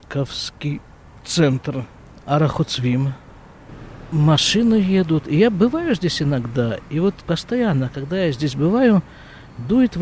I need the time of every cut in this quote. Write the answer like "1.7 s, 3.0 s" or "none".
7.2 s